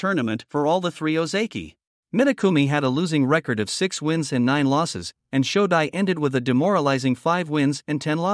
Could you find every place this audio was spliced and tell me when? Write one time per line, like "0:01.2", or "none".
0:01.9